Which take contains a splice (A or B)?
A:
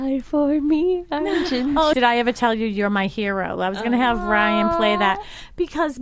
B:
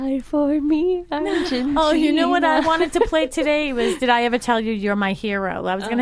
A